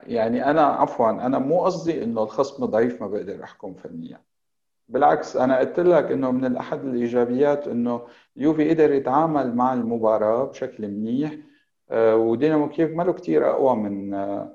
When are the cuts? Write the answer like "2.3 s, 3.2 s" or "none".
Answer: none

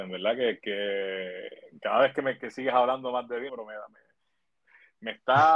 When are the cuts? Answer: 2.4 s, 3.5 s

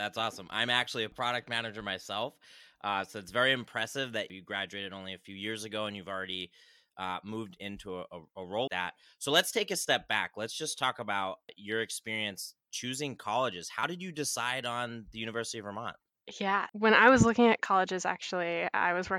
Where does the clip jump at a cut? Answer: 8.7 s

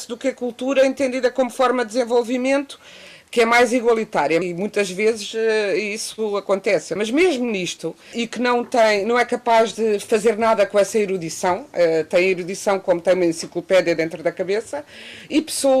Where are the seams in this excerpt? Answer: 4.4 s, 7.0 s, 8.1 s

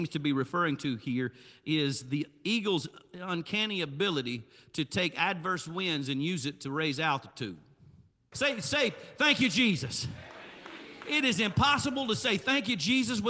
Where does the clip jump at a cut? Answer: 8.3 s

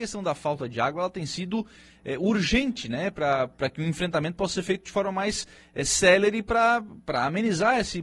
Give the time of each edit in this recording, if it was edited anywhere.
none

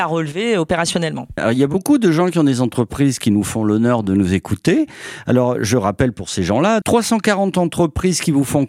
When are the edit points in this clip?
1.4 s, 6.8 s

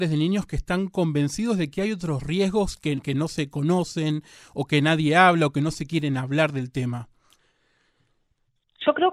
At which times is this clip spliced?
3.0 s

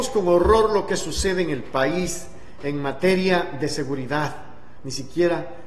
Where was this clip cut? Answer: 4.8 s

